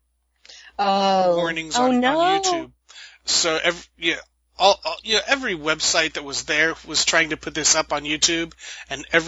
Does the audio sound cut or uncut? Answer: uncut